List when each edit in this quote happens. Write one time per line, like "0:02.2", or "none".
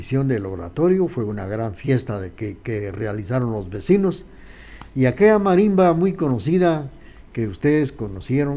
none